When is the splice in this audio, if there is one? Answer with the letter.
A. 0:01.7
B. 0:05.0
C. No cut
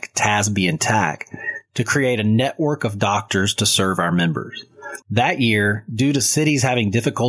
B